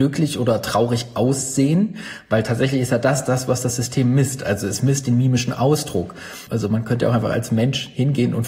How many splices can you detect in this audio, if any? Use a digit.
1